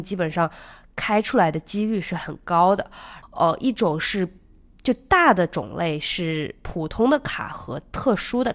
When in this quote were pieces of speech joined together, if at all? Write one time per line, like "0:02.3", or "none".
0:03.2